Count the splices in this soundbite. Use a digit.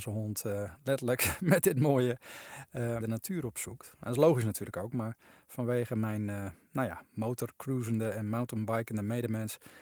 1